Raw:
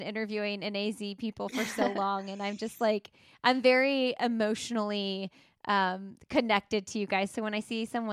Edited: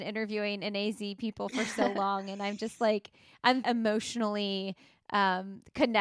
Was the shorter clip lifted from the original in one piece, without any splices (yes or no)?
no